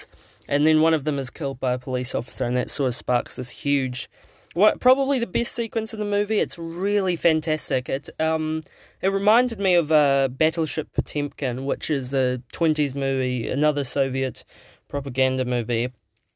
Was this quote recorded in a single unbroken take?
yes; 0 cuts

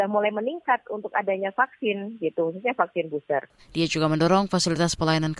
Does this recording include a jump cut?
yes; 1 cut; at 3.6 s

